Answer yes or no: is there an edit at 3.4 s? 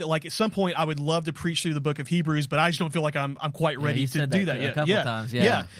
no